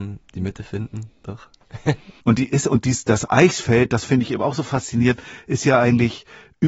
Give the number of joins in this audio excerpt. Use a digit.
1